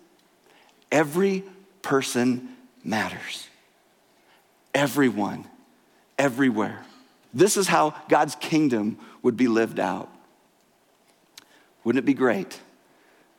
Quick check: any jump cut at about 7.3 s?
yes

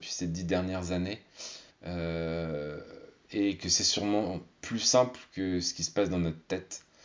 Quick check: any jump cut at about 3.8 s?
no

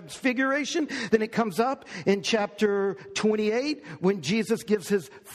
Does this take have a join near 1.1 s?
no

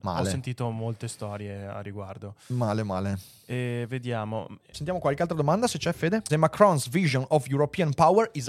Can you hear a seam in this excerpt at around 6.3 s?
yes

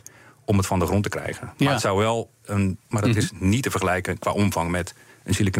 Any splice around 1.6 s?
no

